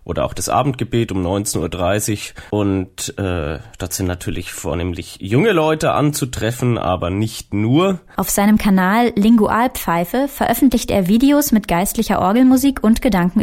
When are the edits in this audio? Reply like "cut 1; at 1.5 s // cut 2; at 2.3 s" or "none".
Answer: cut 1; at 2.5 s // cut 2; at 8.2 s

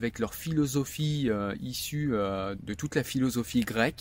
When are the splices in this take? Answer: cut 1; at 2.5 s

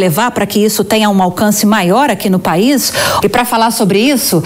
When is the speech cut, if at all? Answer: cut 1; at 3.2 s

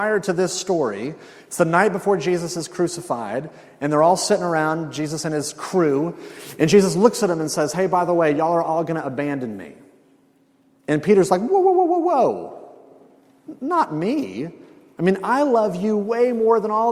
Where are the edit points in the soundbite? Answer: none

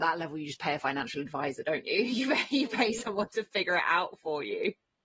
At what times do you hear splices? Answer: none

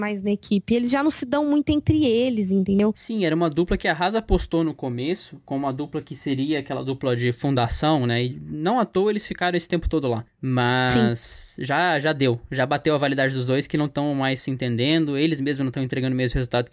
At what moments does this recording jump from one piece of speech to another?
none

